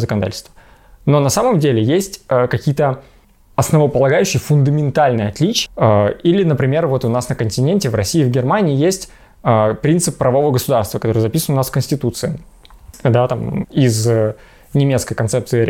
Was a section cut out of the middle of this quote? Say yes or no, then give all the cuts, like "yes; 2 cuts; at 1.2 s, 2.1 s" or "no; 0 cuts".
yes; 2 cuts; at 5.7 s, 13.6 s